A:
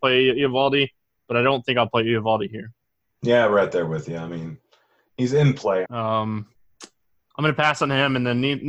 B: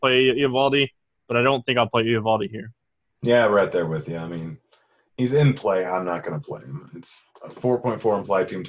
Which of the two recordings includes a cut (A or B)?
A